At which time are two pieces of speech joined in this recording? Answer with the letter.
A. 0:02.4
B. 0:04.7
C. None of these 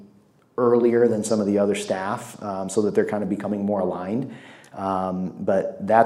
C